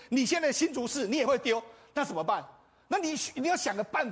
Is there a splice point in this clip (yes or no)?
no